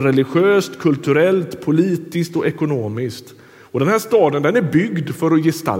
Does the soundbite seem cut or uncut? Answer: uncut